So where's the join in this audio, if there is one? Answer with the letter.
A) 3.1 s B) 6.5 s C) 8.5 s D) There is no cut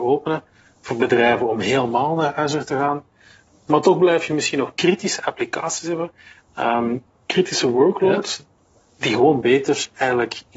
D